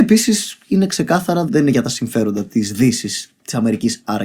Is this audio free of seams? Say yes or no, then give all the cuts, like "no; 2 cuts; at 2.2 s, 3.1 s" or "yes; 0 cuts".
no; 1 cut; at 1.5 s